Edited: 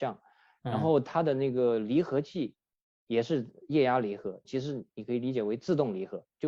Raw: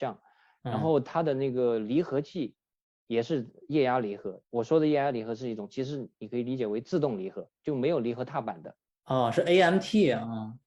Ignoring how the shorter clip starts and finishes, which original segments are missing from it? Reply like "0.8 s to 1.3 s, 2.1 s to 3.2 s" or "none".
4.4 s to 5.7 s